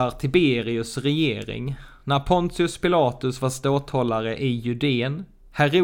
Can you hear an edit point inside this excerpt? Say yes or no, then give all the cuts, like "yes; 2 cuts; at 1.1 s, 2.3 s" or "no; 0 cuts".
no; 0 cuts